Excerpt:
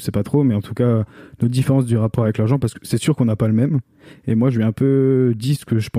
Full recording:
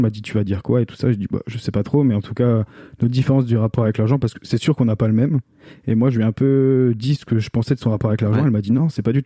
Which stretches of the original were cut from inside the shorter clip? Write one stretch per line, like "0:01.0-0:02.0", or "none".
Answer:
none

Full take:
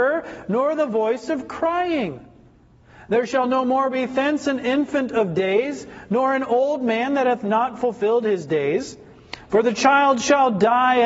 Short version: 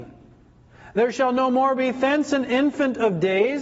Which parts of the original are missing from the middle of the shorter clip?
none

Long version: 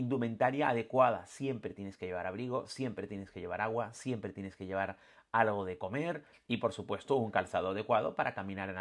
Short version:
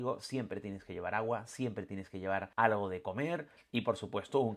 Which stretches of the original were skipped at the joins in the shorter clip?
0:05.0-0:05.3

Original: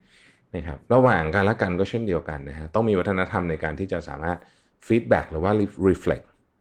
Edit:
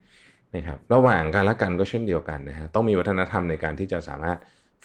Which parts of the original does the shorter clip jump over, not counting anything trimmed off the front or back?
none

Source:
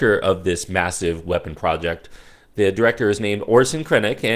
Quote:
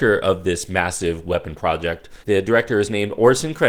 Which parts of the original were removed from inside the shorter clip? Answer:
0:02.2-0:02.5

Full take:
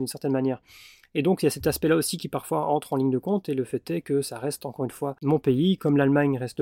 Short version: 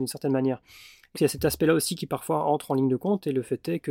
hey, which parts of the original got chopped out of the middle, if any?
0:01.1-0:01.4

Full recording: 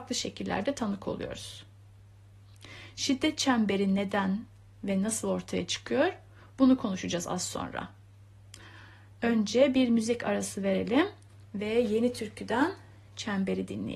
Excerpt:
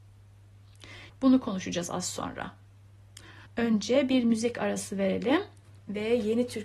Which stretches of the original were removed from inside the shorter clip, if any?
0:02.9-0:06.5
0:08.8-0:09.1

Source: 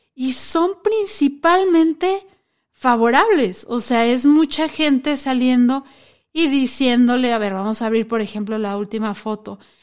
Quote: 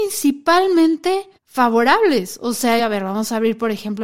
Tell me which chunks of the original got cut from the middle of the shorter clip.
0:02.3-0:02.6
0:04.1-0:07.3

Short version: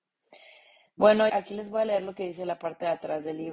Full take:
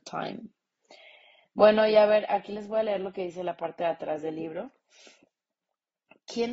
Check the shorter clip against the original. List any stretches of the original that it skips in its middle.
0:01.9-0:02.3

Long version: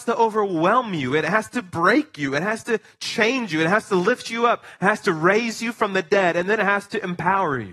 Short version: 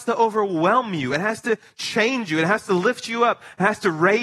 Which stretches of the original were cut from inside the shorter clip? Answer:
0:01.1-0:02.3

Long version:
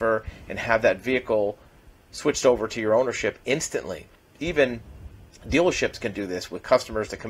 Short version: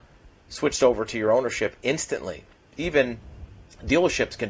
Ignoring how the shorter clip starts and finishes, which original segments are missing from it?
none

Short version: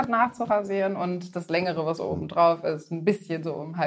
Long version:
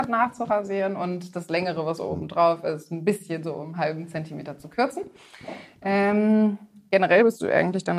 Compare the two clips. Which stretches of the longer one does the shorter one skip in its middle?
none

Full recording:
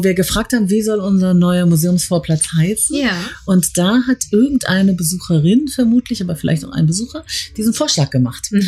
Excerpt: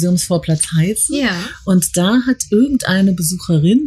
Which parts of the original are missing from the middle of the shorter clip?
none

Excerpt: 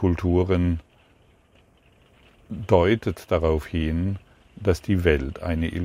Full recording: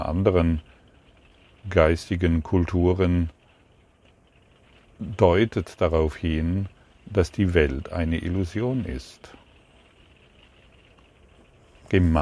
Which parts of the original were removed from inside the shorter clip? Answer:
none

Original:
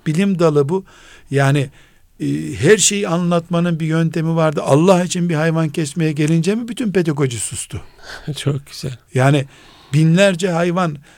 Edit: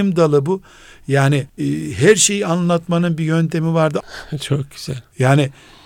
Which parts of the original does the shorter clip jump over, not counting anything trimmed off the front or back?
0:01.7-0:02.1
0:04.6-0:08.0

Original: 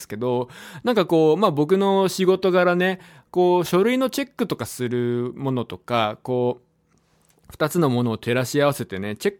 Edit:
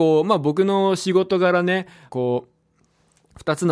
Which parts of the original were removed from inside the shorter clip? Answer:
0:03.2-0:06.2

